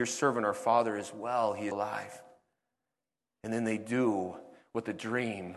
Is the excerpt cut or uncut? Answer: cut